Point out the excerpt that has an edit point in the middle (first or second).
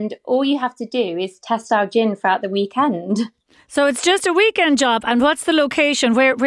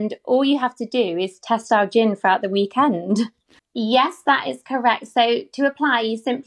second